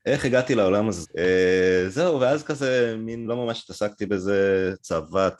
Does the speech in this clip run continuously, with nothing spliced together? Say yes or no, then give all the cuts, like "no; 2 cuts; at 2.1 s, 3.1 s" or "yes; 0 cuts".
no; 2 cuts; at 1.0 s, 3.2 s